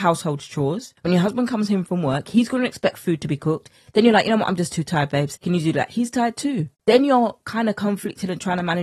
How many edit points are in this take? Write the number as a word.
one